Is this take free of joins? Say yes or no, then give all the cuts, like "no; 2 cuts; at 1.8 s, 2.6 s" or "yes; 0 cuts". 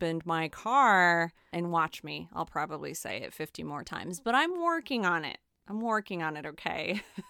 no; 1 cut; at 1.5 s